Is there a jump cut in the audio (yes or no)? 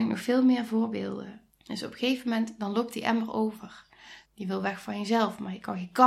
yes